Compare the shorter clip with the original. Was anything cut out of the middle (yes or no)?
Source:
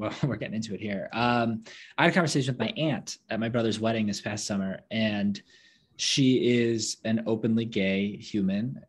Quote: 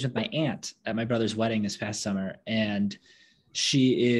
no